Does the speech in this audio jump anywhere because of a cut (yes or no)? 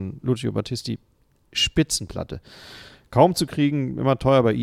no